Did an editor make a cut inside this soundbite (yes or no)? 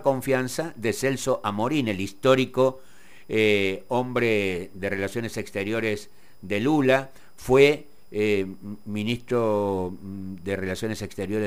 no